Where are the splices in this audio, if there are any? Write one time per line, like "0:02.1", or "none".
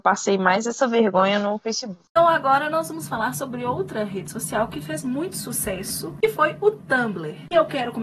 none